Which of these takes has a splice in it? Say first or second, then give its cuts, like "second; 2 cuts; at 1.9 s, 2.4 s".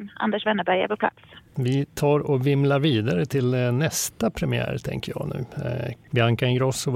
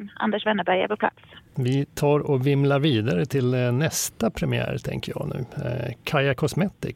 first; 1 cut; at 6.0 s